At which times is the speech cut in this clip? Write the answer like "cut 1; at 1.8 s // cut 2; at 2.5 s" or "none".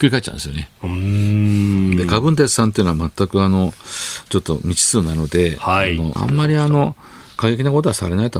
cut 1; at 6.2 s